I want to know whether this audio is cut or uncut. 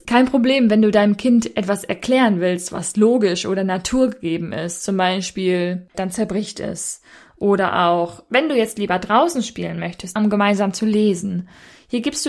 cut